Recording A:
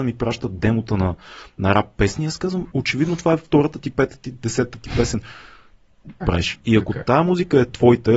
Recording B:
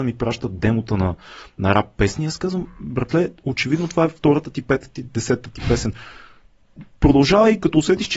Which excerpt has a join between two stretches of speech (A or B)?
A